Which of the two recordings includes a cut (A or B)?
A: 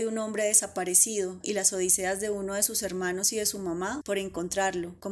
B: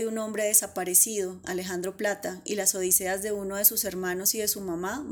A